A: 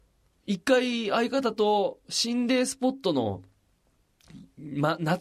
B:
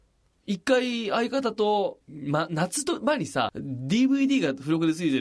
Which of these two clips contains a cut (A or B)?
B